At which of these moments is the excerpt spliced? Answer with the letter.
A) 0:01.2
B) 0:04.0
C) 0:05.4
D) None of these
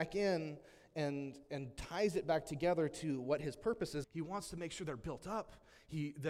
B